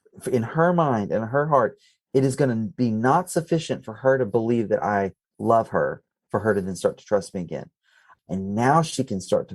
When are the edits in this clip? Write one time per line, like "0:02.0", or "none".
0:08.2